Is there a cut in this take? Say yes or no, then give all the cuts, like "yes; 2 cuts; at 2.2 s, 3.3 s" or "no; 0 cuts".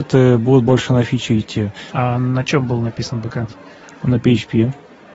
yes; 1 cut; at 1.9 s